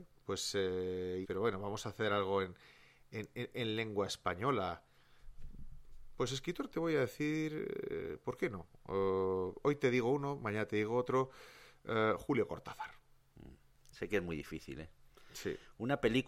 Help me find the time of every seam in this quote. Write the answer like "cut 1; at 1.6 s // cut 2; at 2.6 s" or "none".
cut 1; at 1.2 s